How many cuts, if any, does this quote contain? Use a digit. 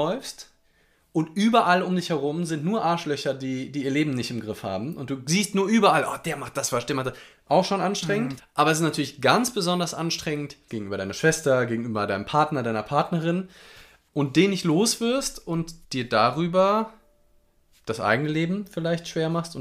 3